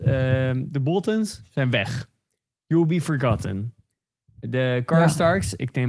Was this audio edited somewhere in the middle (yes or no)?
no